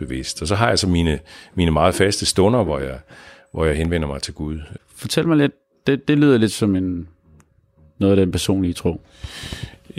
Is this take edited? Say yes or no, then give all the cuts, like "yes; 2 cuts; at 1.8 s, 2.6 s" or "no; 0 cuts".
yes; 1 cut; at 4.8 s